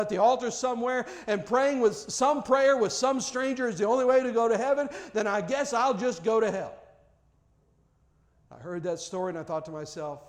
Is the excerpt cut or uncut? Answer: uncut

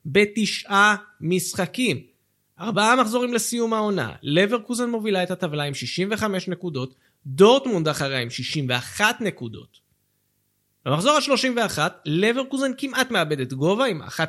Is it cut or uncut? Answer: uncut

